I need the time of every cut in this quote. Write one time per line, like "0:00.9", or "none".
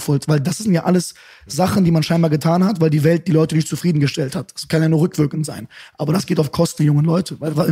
none